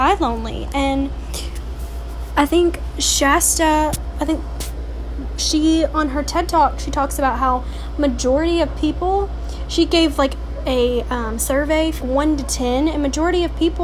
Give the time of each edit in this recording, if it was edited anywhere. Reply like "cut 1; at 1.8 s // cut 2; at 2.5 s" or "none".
cut 1; at 12.0 s